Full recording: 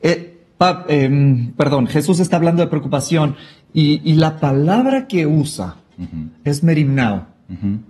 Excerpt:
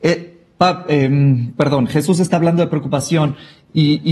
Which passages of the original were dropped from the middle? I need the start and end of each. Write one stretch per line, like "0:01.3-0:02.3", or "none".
none